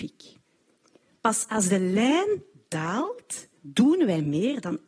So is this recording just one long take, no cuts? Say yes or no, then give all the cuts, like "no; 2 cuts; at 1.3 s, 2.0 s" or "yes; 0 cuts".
no; 1 cut; at 3.6 s